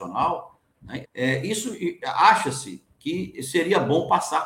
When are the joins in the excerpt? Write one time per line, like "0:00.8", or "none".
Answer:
0:01.0